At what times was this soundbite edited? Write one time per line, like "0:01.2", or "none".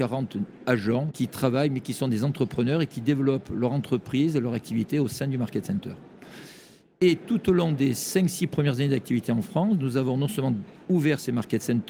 0:01.1